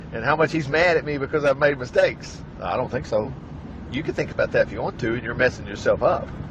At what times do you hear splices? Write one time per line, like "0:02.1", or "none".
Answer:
0:02.5